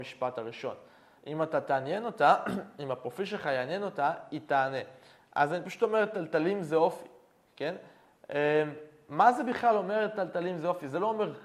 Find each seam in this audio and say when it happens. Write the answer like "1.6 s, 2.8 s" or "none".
1.2 s